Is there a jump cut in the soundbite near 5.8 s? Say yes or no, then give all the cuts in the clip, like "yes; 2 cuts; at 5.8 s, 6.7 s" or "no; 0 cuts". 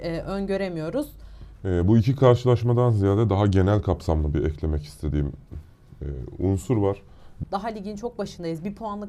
no; 2 cuts; at 1.6 s, 7.4 s